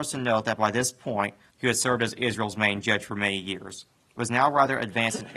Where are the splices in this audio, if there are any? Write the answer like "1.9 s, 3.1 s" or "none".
1.5 s